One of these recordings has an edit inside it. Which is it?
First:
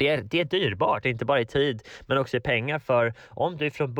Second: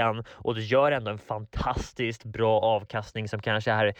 first; 1 cut; at 1.0 s

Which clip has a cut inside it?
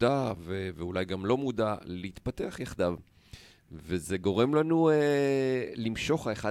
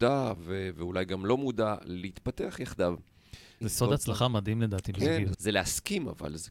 second; 2 cuts; at 3.6 s, 5.3 s

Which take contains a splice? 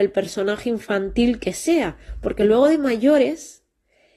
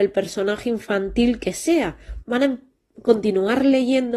second; 1 cut; at 2.2 s

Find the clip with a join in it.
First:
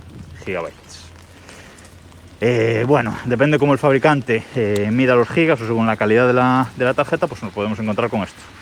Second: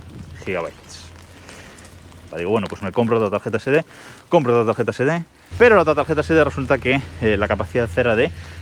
second; 2 cuts; at 2.3 s, 5.5 s

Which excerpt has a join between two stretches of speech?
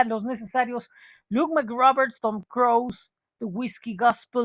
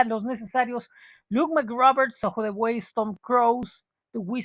first; 1 cut; at 2.2 s

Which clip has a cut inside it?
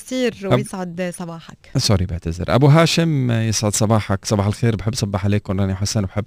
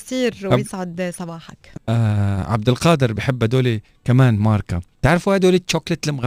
second; 2 cuts; at 1.7 s, 4.9 s

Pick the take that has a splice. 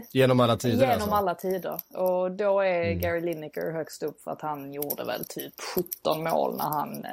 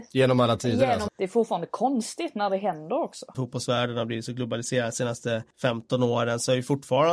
second; 3 cuts; at 1.1 s, 3.3 s, 5.5 s

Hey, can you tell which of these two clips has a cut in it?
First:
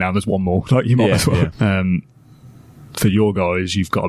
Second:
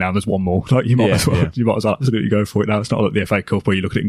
first; 1 cut; at 1.5 s

